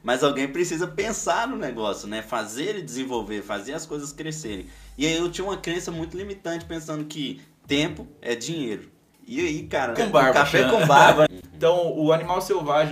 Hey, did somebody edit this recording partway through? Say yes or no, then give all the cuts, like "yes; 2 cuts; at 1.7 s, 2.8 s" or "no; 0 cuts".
yes; 2 cuts; at 10.0 s, 11.3 s